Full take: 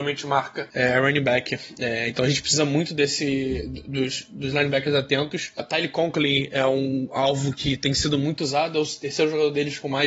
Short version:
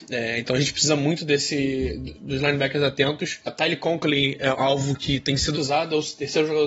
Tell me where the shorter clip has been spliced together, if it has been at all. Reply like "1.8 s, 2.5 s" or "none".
2.1 s, 4.5 s, 5.5 s